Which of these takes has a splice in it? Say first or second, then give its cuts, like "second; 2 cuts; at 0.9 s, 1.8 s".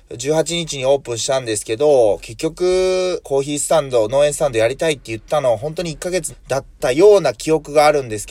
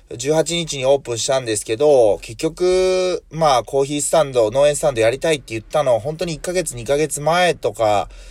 first; 2 cuts; at 3.2 s, 6.3 s